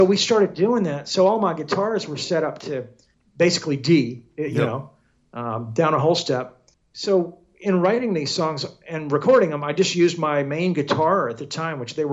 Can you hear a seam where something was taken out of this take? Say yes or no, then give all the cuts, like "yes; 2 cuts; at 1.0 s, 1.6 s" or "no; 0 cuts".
no; 0 cuts